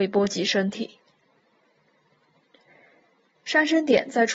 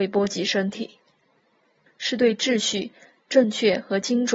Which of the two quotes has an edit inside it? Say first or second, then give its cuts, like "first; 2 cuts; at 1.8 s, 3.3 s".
second; 1 cut; at 1.9 s